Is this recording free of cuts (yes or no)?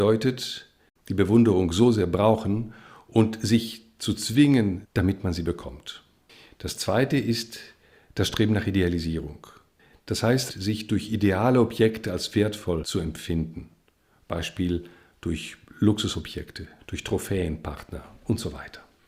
no